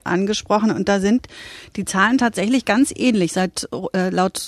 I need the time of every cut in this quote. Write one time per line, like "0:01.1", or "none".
none